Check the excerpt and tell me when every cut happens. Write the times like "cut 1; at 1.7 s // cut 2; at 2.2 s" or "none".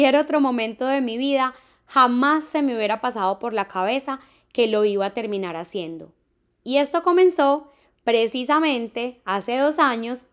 none